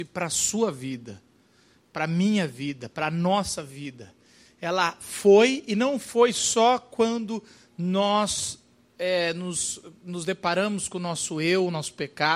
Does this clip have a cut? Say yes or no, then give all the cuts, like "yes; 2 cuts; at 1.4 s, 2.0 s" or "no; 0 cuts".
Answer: no; 0 cuts